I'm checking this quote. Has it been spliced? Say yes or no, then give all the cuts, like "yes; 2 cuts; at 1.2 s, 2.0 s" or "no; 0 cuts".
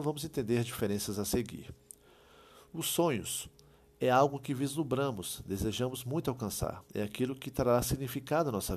no; 0 cuts